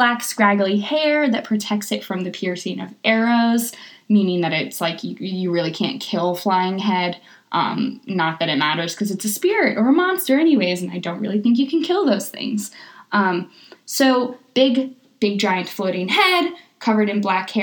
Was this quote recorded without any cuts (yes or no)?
yes